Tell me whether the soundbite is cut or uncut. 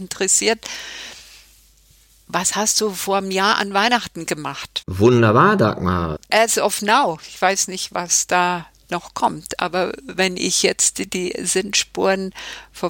cut